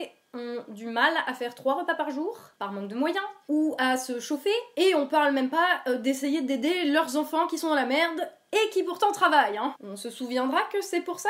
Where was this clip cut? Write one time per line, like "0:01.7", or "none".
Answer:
none